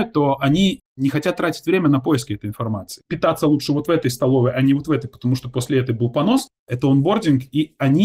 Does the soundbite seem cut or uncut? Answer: cut